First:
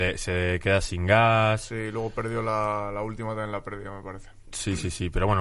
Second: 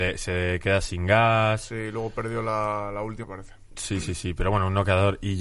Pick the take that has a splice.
second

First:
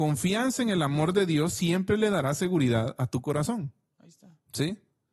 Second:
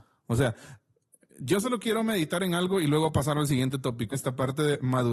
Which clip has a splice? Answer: second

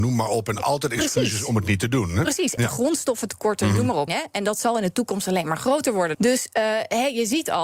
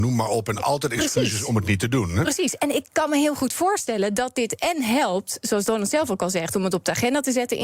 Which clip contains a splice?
first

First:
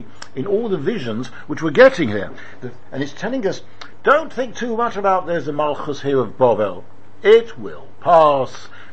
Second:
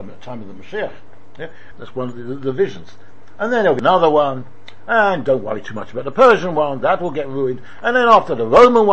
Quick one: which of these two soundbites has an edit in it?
second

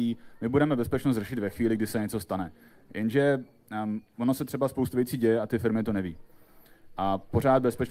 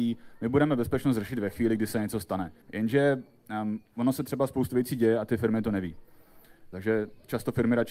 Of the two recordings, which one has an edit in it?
second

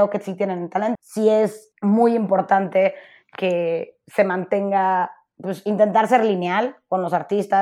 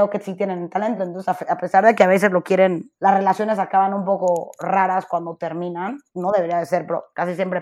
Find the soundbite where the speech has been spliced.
first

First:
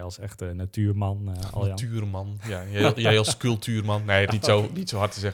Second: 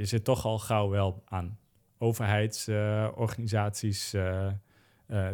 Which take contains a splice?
first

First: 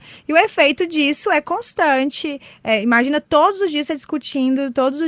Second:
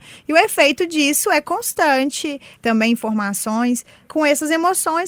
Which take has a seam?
second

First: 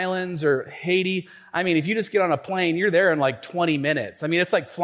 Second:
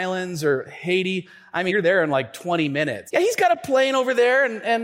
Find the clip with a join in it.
second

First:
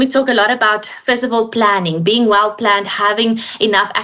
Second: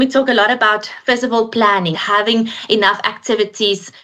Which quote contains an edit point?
second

